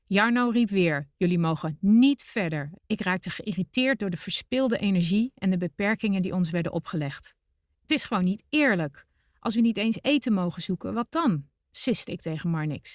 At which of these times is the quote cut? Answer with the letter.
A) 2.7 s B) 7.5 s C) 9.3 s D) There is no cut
A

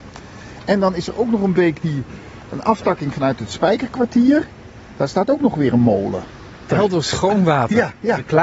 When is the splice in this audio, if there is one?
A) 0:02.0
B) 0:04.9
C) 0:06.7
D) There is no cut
C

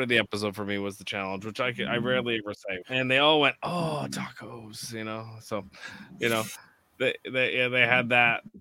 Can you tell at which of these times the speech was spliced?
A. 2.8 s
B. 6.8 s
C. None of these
A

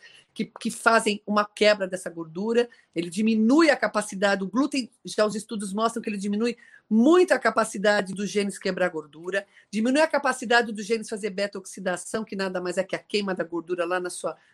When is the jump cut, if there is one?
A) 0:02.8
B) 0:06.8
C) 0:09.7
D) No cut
D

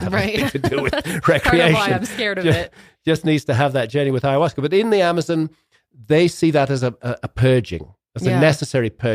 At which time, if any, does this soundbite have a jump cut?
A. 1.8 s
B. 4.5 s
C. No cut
C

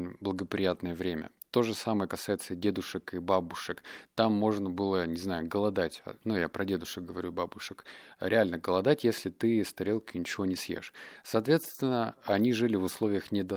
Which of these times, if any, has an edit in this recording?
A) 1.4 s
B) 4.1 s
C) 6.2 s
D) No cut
D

